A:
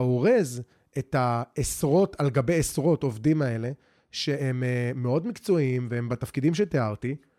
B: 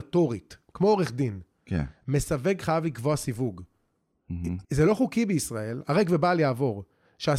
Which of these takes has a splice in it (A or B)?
B